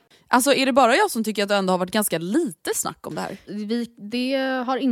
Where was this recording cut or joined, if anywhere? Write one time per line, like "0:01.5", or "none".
0:03.5